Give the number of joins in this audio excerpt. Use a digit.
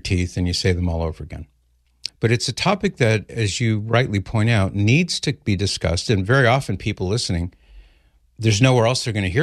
1